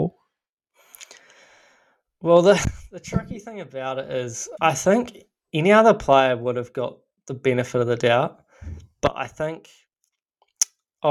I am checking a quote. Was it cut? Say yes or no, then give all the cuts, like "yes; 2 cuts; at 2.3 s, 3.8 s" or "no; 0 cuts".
yes; 1 cut; at 4.6 s